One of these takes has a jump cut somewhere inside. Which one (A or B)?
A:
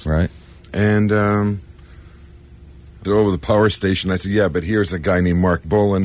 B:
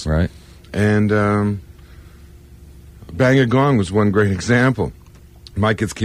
A